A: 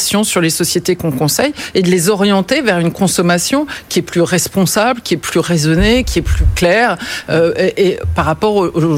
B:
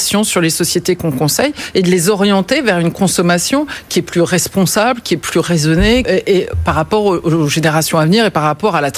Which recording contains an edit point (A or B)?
B